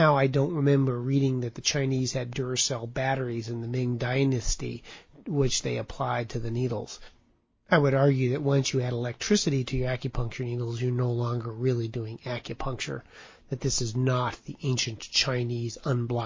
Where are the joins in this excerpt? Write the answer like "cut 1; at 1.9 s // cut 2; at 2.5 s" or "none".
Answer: none